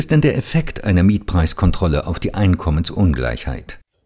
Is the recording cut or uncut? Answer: uncut